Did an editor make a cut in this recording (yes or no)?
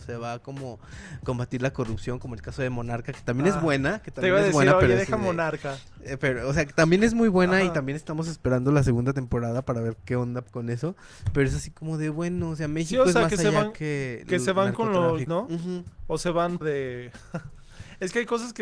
yes